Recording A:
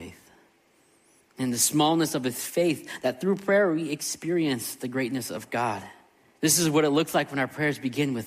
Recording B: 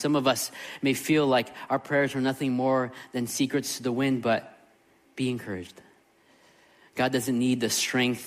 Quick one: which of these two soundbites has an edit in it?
A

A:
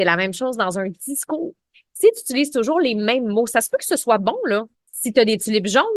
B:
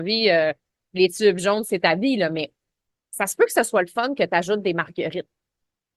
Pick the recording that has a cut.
A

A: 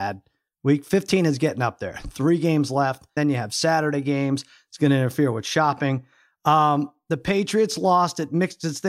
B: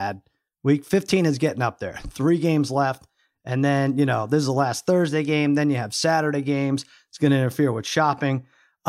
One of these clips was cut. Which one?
A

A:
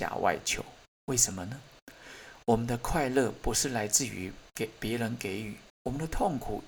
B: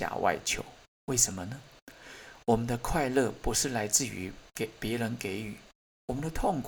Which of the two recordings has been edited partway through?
A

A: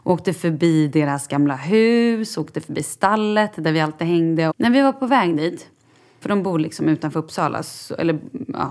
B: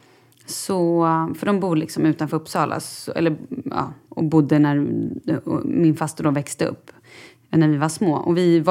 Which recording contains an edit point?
A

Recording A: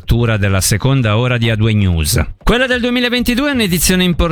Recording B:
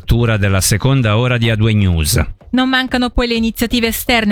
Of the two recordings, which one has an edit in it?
A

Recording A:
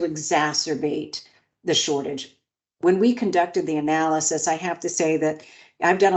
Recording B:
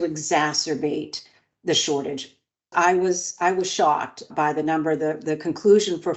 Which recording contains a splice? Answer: B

